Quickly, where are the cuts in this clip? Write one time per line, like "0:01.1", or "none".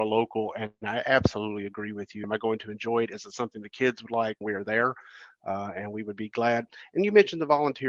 0:02.2
0:04.4